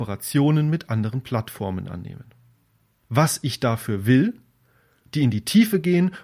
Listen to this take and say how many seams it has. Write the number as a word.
one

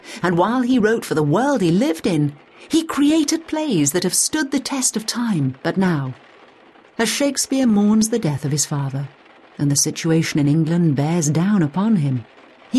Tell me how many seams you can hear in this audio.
one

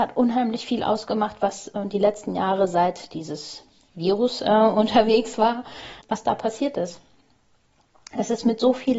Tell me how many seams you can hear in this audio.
one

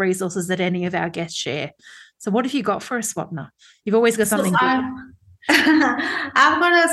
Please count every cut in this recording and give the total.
zero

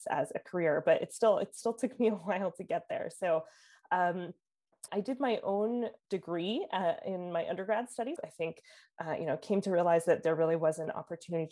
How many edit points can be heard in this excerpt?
three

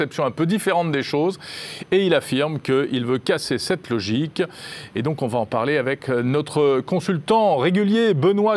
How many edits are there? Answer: one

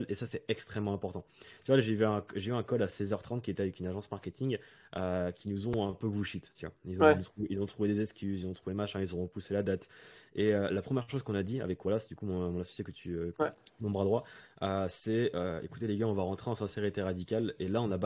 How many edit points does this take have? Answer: one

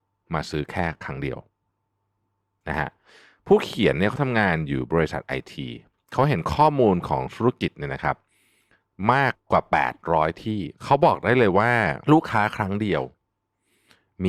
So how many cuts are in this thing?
three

